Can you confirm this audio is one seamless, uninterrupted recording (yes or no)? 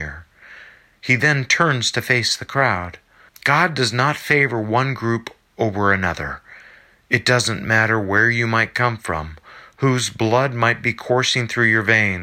no